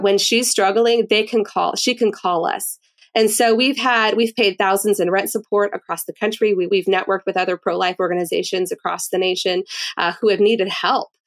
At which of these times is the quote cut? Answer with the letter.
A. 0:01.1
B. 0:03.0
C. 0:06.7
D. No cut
C